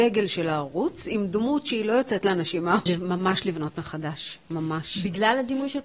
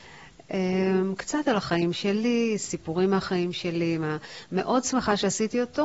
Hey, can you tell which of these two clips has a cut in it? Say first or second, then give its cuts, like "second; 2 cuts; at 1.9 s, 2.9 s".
first; 1 cut; at 2.9 s